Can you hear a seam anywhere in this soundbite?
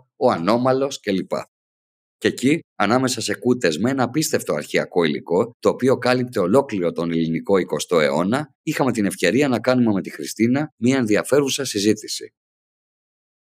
no; 0 cuts

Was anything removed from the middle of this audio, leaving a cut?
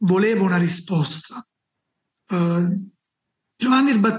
yes; 1 cut; at 2.2 s

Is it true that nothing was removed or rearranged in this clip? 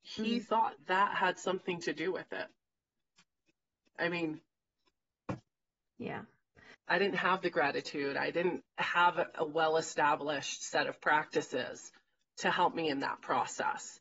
no; 2 cuts; at 3.8 s, 6.7 s

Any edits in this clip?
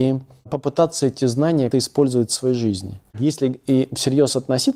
yes; 2 cuts; at 1.7 s, 3.1 s

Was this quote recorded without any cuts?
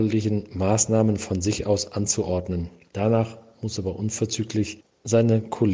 yes; 0 cuts

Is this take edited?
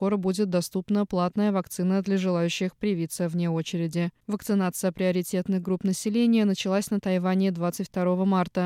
yes; 1 cut; at 4.2 s

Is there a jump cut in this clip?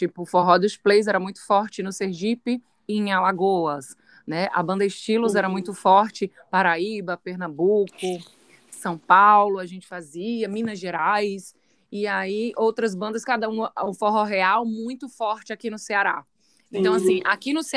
no; 0 cuts

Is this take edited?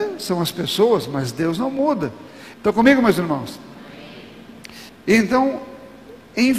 yes; 2 cuts; at 2.5 s, 4.9 s

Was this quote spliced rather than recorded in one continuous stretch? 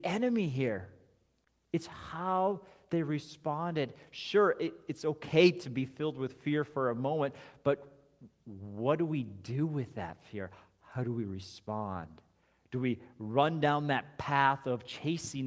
no; 0 cuts

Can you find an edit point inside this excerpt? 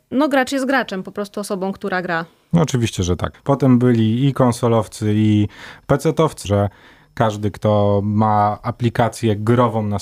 yes; 2 cuts; at 3.3 s, 6.4 s

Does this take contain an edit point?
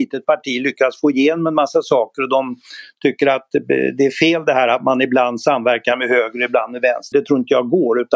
yes; 1 cut; at 7.1 s

